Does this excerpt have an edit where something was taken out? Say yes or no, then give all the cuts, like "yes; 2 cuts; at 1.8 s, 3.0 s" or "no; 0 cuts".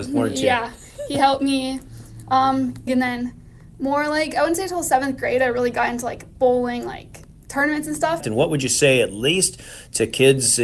yes; 2 cuts; at 2.9 s, 8.2 s